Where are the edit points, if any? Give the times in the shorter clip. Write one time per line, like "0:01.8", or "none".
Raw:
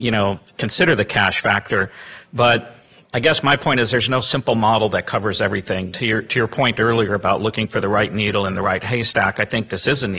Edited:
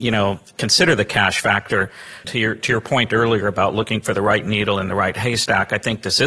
0:02.2